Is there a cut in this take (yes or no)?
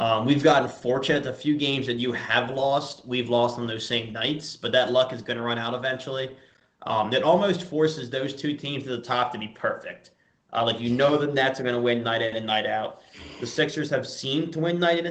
no